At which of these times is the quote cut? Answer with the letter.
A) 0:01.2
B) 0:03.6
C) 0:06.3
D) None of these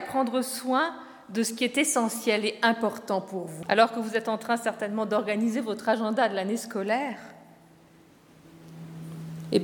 B